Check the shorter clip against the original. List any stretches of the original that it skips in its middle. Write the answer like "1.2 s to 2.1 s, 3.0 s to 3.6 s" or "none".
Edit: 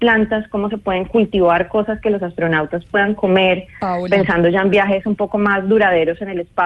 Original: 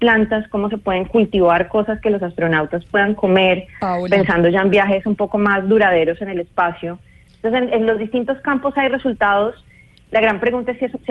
none